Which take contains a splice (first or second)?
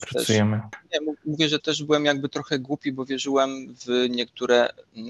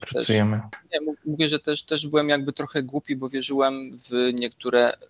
first